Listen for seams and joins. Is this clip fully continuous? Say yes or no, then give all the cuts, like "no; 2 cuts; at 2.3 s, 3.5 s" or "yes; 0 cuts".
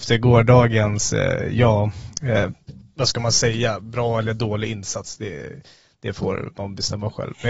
yes; 0 cuts